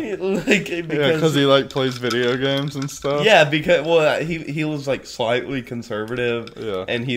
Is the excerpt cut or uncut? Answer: uncut